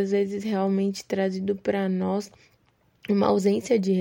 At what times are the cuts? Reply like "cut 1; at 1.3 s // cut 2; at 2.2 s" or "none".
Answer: none